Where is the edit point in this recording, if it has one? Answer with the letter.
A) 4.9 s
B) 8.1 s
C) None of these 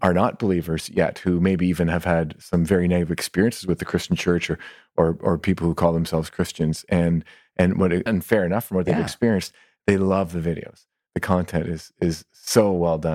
B